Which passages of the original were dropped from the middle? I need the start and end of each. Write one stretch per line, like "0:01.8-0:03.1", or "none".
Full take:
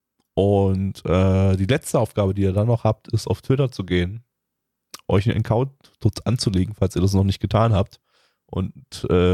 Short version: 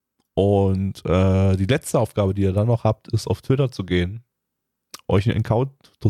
none